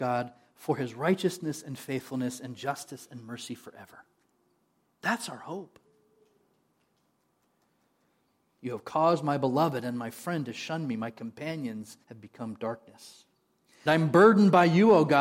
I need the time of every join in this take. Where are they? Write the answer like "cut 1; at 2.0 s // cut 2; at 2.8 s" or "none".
cut 1; at 8.5 s // cut 2; at 12.0 s // cut 3; at 13.9 s